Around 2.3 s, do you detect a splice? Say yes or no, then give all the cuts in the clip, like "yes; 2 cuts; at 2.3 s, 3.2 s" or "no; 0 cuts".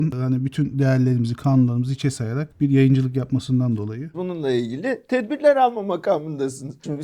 no; 1 cut; at 4.1 s